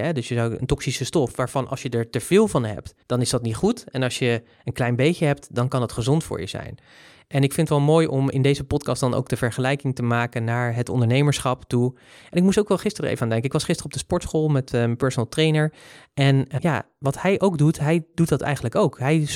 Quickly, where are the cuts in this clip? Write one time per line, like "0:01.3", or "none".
0:03.0
0:16.6